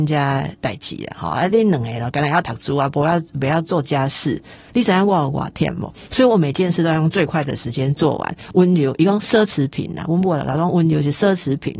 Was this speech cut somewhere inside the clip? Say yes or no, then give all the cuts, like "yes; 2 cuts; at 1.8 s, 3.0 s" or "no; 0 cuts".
no; 0 cuts